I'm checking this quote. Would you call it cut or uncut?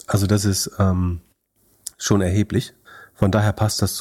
uncut